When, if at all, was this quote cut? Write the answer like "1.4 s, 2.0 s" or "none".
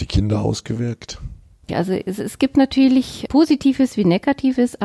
1.7 s